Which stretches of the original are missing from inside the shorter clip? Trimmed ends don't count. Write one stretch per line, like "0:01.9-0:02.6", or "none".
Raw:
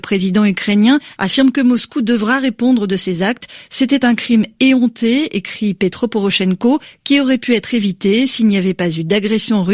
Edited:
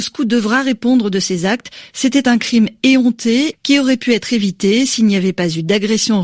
0:05.3-0:06.9